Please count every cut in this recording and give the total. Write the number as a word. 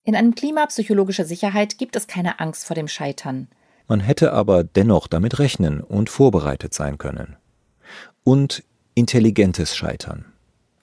one